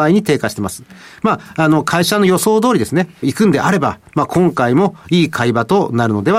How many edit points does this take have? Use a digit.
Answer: 1